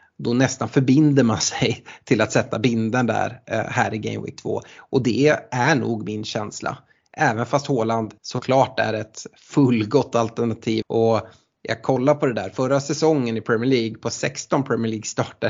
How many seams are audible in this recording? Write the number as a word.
two